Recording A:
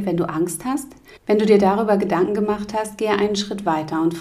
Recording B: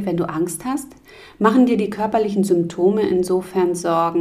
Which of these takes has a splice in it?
A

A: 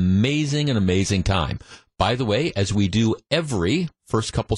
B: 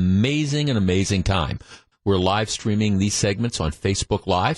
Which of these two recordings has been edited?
B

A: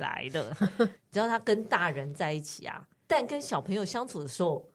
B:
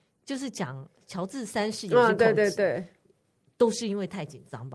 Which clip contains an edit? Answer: A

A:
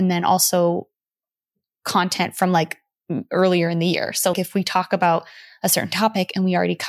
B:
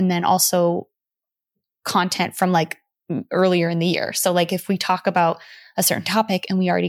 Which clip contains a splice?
A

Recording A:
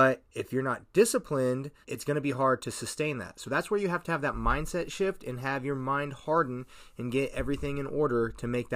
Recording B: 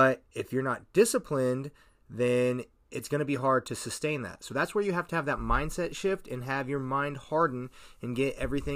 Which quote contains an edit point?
A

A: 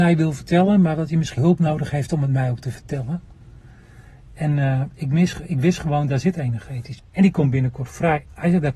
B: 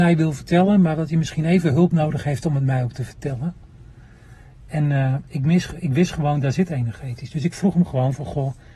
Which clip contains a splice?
A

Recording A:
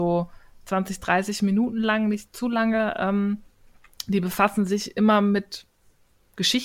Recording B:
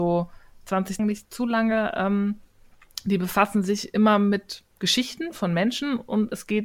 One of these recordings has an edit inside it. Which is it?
B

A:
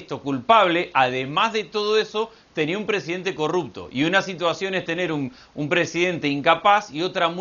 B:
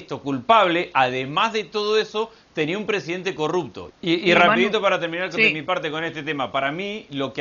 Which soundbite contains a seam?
B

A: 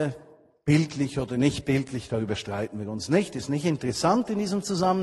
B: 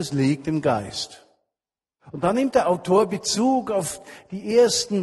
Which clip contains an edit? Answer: B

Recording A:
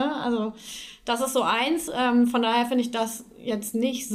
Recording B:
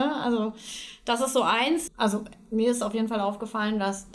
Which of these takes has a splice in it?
B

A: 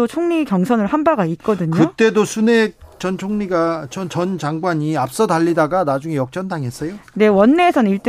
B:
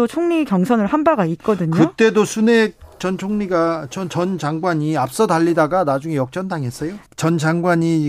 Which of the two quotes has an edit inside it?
B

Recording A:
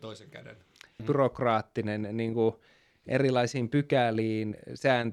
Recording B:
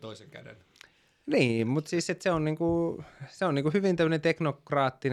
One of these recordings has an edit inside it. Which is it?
A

